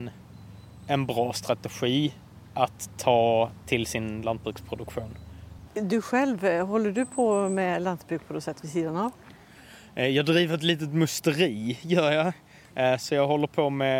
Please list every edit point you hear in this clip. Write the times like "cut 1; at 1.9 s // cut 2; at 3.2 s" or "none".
cut 1; at 3.6 s // cut 2; at 5.7 s